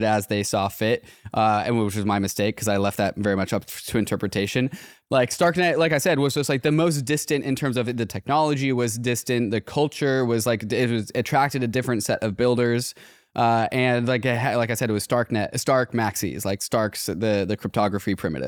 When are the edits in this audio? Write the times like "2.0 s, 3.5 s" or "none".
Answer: 5.0 s